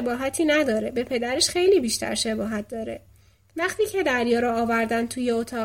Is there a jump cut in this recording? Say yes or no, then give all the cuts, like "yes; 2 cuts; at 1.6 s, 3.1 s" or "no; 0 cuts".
no; 0 cuts